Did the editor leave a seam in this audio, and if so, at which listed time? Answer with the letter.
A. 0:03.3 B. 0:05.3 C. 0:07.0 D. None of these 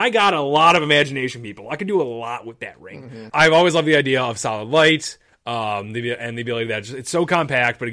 A